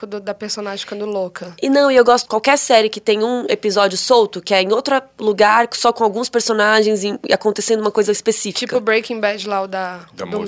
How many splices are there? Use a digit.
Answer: 1